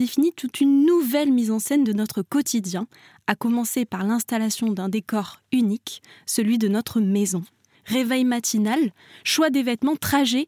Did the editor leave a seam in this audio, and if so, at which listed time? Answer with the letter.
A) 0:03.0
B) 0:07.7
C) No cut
B